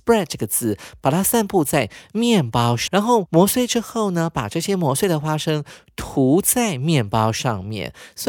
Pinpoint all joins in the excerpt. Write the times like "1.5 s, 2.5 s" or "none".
2.9 s